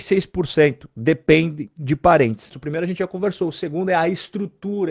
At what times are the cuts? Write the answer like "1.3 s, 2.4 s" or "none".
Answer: 2.5 s